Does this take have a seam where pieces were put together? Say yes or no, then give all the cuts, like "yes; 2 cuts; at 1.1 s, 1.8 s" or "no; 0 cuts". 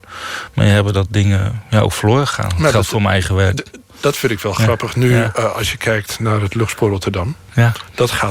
yes; 1 cut; at 3.6 s